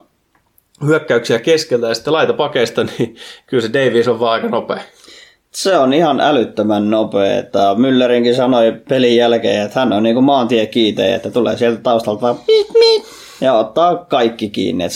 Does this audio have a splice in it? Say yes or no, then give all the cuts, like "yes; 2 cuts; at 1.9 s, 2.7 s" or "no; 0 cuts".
no; 0 cuts